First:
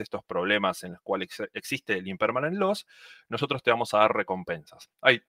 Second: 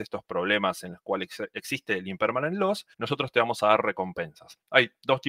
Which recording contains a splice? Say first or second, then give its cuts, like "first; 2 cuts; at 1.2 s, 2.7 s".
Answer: second; 1 cut; at 2.9 s